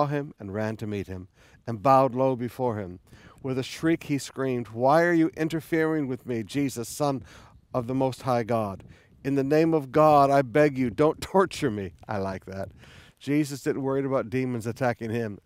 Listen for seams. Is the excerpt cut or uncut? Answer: uncut